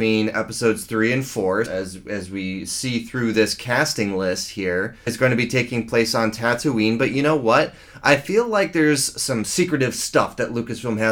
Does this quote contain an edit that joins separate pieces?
yes; 2 cuts; at 1.7 s, 5.1 s

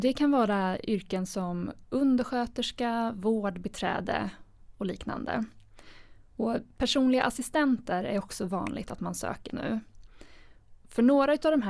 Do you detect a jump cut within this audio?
yes; 1 cut; at 9.5 s

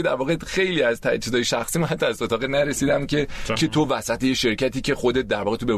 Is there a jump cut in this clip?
yes; 1 cut; at 3.5 s

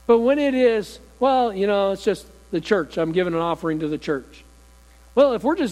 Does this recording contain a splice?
no; 0 cuts

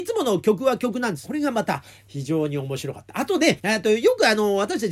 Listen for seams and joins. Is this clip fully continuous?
no; 2 cuts; at 1.2 s, 3.6 s

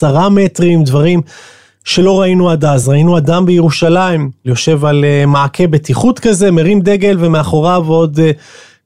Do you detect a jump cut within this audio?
no; 0 cuts

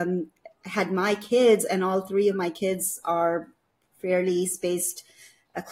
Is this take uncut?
yes; 0 cuts

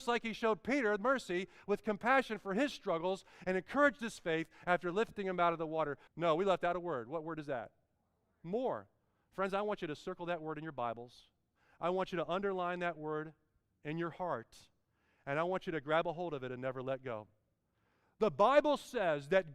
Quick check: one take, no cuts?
no; 1 cut; at 6.1 s

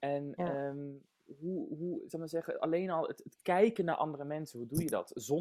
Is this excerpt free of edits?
yes; 0 cuts

